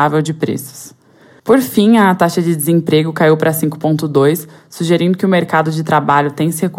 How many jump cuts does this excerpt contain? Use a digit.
1